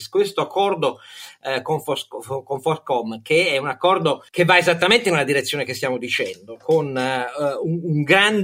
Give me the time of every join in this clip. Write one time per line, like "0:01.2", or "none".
none